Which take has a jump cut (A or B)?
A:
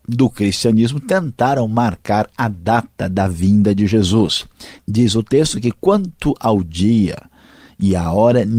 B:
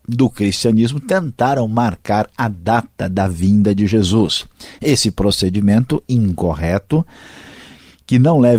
A